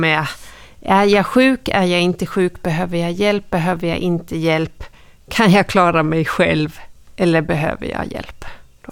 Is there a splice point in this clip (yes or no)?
no